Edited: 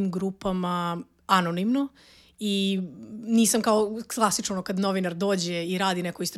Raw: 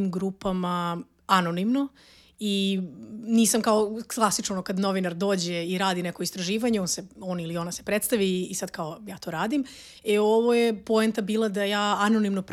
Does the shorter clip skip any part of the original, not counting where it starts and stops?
no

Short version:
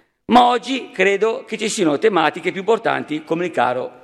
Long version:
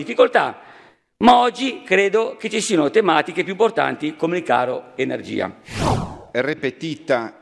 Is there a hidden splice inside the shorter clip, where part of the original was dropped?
no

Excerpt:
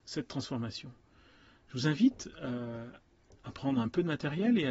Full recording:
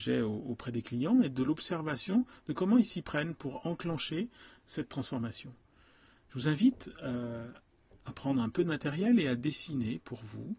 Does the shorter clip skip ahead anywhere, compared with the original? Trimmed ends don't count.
no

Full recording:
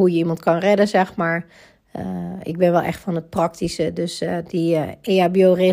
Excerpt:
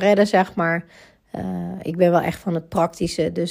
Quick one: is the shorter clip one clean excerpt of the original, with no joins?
yes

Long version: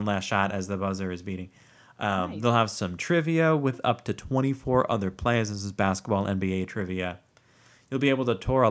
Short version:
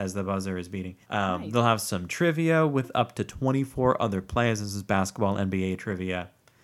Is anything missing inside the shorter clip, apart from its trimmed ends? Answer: yes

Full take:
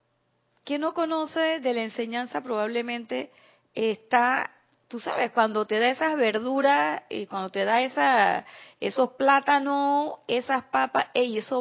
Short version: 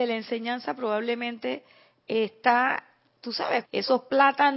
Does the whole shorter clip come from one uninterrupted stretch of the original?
no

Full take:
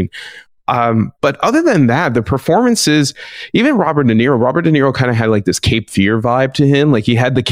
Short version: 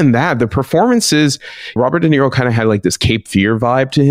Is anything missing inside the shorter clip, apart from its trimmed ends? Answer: yes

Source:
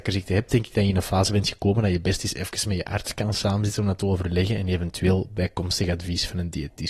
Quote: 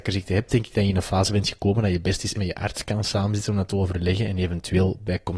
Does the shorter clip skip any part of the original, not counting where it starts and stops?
yes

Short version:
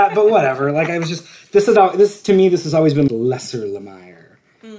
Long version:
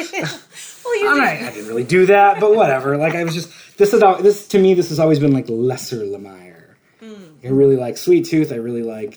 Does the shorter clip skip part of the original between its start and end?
yes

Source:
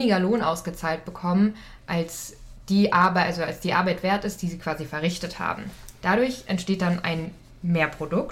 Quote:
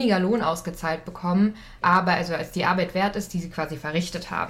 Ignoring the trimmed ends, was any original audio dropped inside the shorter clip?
yes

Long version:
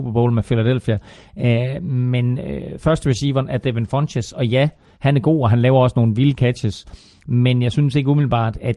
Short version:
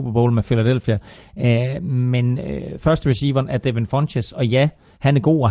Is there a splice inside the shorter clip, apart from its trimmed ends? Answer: no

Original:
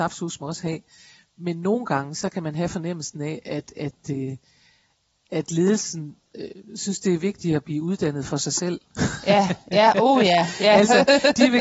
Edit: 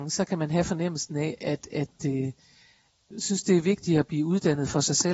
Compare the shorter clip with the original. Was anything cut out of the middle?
yes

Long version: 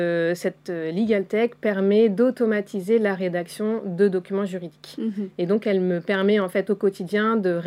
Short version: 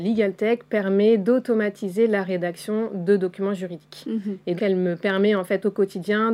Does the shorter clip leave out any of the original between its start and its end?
yes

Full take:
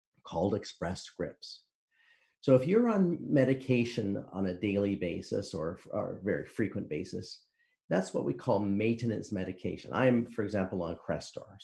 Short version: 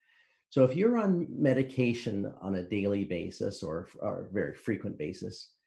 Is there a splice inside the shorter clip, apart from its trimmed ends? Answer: no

